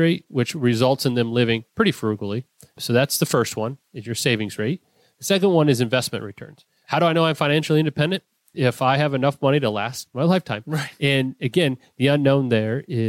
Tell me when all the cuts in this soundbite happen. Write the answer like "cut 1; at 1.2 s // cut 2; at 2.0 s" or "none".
none